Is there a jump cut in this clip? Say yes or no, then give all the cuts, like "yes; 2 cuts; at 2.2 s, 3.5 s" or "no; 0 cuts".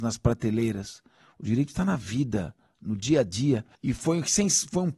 yes; 1 cut; at 3.8 s